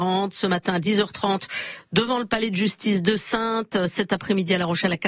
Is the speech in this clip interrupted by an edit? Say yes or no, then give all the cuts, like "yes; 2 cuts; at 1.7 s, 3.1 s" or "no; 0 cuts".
no; 0 cuts